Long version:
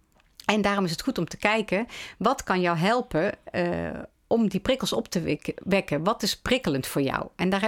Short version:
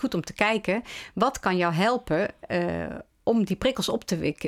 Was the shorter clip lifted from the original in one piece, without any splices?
yes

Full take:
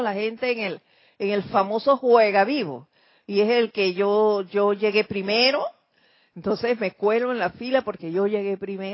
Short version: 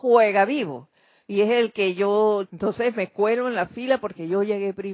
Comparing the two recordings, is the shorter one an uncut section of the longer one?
no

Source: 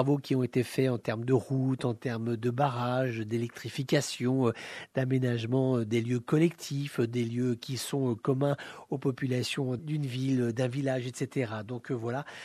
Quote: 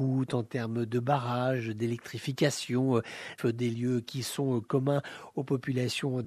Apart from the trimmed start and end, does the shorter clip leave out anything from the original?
yes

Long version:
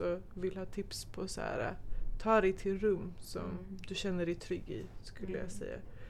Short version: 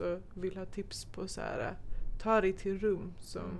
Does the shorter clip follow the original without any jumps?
yes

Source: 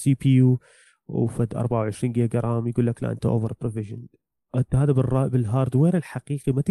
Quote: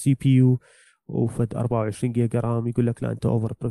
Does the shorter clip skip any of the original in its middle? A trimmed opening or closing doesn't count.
no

